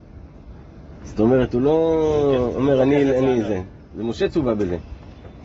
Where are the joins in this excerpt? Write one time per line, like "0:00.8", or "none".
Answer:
0:01.0